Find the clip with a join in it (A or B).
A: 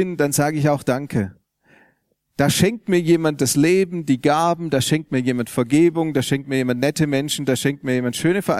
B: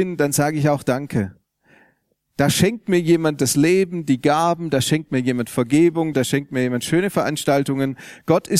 B